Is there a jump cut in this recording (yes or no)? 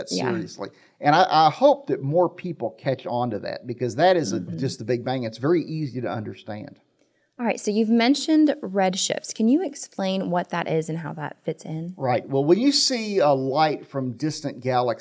yes